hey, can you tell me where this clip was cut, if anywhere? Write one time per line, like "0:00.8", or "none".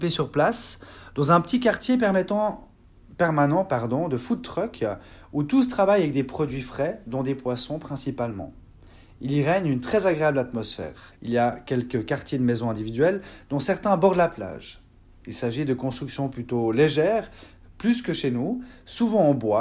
0:11.2